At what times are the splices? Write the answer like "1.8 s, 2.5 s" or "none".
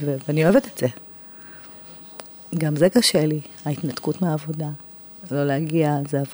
none